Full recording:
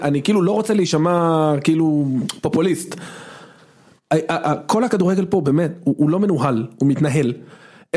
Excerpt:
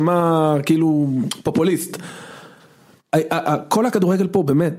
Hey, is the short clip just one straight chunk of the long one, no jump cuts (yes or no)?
yes